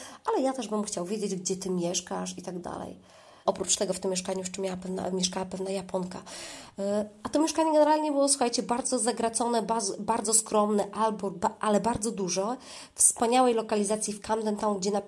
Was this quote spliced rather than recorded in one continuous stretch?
yes; 1 cut; at 3.5 s

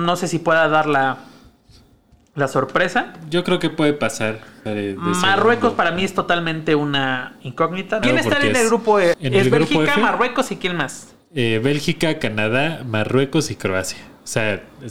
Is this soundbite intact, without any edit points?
no; 3 cuts; at 4.7 s, 8.0 s, 9.1 s

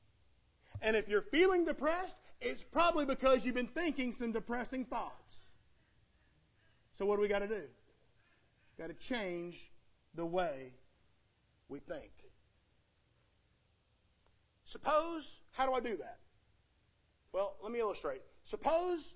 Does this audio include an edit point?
no; 0 cuts

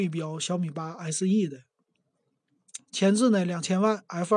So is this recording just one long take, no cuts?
no; 1 cut; at 2.9 s

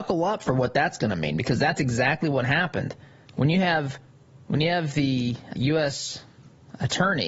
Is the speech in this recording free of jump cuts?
no; 2 cuts; at 3.3 s, 5.5 s

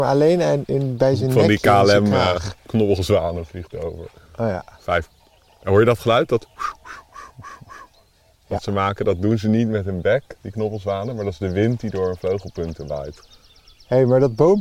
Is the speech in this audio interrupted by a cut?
no; 0 cuts

